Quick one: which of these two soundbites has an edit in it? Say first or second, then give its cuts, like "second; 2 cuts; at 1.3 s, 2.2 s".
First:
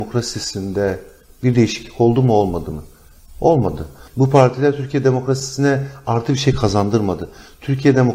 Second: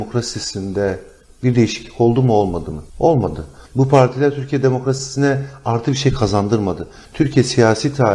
second; 2 cuts; at 2.9 s, 7.1 s